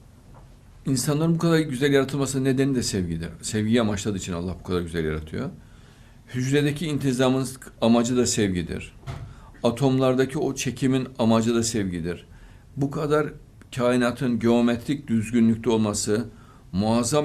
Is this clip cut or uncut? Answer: uncut